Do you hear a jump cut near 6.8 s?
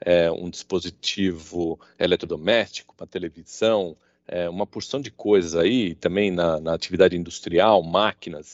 no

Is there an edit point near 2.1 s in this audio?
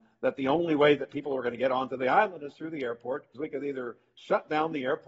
no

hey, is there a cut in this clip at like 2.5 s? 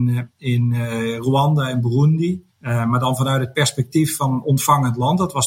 yes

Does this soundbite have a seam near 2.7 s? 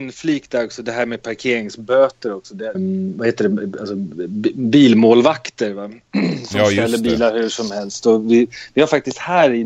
yes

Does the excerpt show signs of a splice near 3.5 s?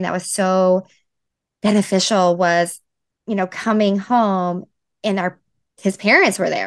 no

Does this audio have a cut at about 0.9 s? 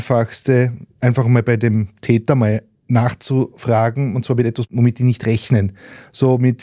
no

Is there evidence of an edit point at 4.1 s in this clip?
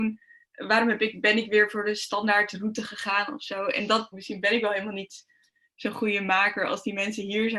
yes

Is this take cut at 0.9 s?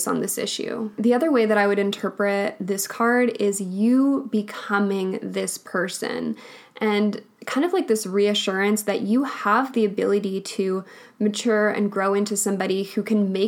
no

